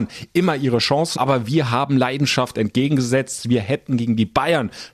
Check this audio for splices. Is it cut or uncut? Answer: cut